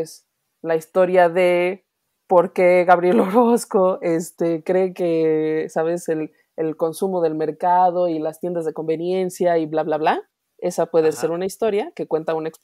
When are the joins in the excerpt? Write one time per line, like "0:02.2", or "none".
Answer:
none